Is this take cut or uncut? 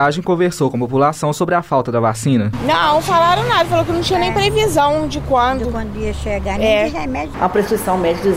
cut